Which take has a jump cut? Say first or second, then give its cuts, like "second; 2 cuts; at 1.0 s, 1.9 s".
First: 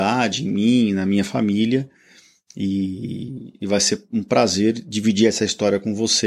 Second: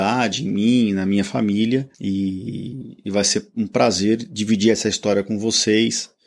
second; 1 cut; at 1.9 s